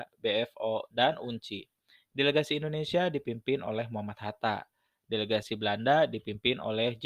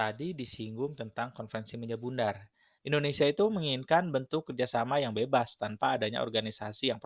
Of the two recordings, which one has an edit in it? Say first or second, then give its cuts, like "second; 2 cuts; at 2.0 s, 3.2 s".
second; 1 cut; at 2.8 s